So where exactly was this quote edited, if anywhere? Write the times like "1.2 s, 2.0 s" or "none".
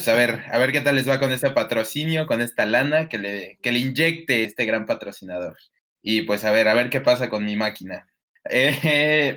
4.4 s, 5.9 s, 8.3 s